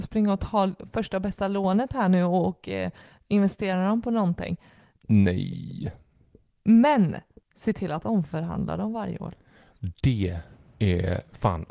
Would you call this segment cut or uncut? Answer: uncut